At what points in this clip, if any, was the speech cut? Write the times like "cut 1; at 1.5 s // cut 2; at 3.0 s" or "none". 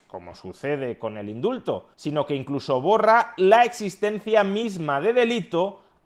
cut 1; at 1.9 s